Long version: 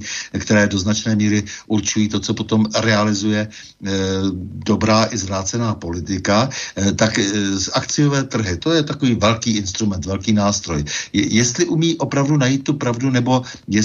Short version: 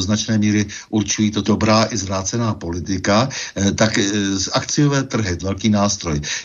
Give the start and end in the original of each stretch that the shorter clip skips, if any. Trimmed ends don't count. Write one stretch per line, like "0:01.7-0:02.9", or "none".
0:02.2-0:04.6
0:08.6-0:10.0